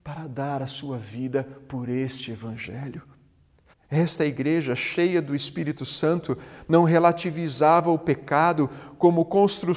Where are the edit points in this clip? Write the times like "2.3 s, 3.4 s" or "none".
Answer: 3.7 s